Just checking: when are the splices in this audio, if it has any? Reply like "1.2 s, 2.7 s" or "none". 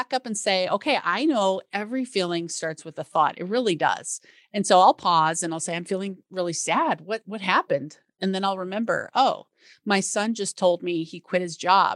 none